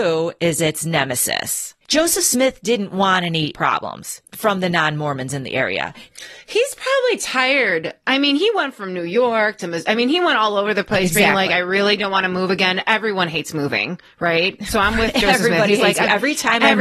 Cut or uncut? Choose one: uncut